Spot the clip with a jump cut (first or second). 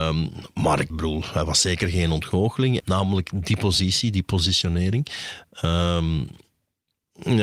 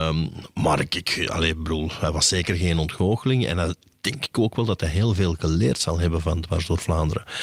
first